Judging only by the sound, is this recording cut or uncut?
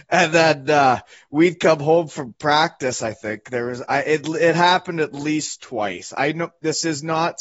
uncut